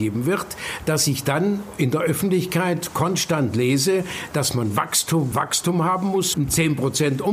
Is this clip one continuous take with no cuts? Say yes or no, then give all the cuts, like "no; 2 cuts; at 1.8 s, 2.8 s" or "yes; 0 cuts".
no; 2 cuts; at 5.3 s, 6.3 s